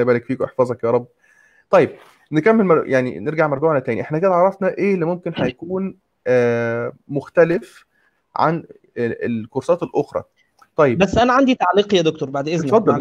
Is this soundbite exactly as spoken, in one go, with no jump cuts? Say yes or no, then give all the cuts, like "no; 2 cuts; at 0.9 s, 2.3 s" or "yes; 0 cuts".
yes; 0 cuts